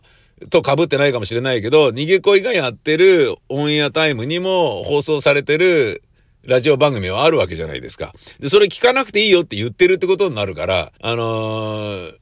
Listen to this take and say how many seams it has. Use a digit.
1